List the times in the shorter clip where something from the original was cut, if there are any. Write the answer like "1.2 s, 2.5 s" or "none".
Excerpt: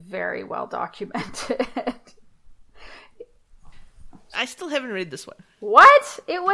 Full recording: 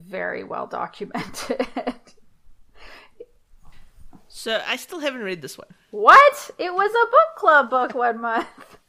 4.3 s